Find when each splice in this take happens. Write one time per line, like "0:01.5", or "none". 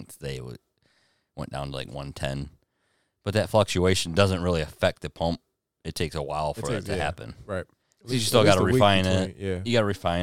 none

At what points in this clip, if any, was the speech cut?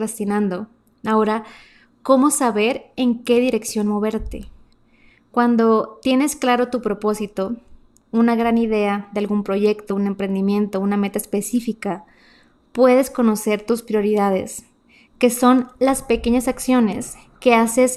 none

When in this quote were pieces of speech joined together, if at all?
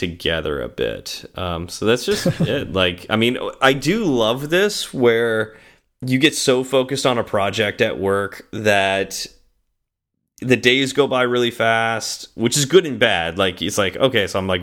none

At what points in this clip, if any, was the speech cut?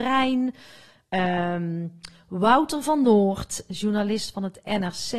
none

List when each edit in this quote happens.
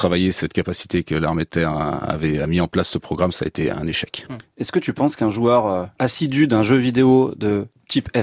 none

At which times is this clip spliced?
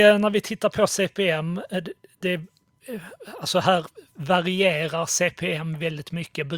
none

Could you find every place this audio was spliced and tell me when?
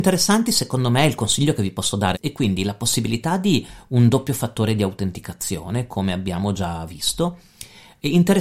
0:02.1

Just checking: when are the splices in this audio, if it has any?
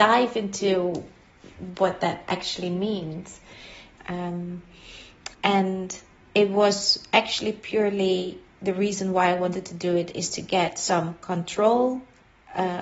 0:04.0
0:05.3

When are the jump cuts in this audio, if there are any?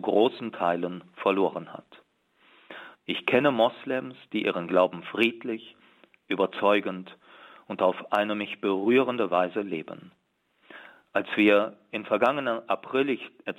0:02.9

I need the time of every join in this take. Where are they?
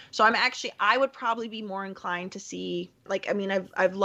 0:03.1

